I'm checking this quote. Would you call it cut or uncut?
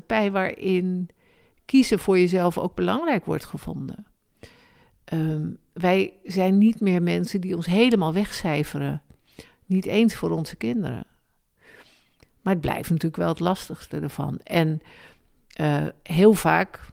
uncut